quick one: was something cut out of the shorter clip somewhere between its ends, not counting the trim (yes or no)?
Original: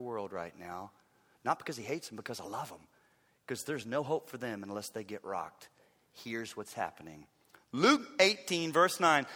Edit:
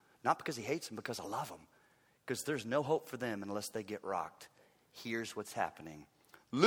no